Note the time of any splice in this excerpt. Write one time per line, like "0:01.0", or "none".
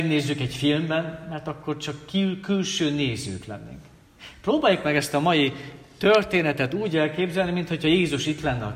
none